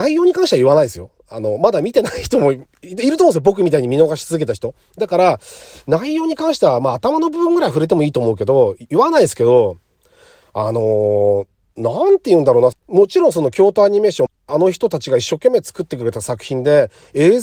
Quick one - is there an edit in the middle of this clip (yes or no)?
yes